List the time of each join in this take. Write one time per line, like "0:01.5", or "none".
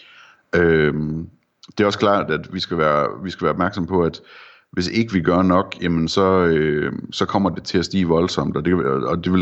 none